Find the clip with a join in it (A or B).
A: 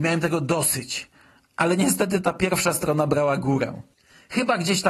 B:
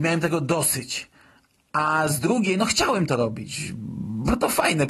A